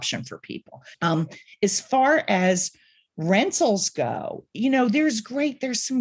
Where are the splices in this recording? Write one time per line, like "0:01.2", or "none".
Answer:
0:00.9
0:04.5